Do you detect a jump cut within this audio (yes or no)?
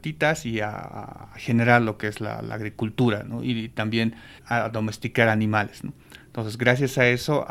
yes